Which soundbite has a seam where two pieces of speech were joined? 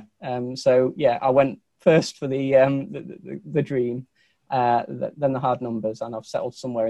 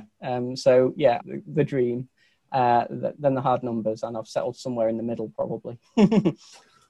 second; 1 cut; at 1.2 s

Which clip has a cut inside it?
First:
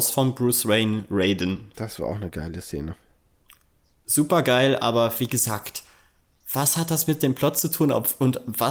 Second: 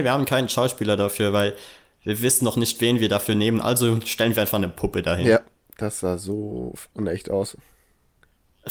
first; 1 cut; at 1.7 s

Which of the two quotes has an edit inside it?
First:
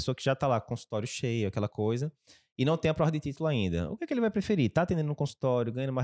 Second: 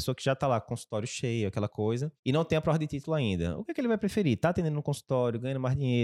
second; 1 cut; at 2.2 s

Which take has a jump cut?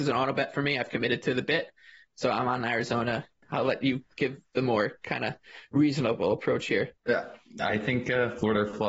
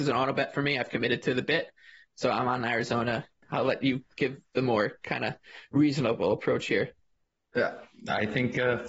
first; 1 cut; at 7.0 s

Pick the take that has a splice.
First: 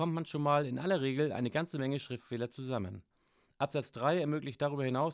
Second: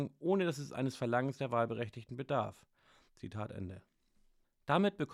second; 1 cut; at 3.1 s

